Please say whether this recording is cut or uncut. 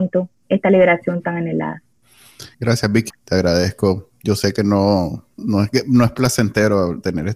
cut